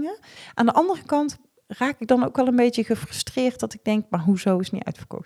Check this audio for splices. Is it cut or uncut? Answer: uncut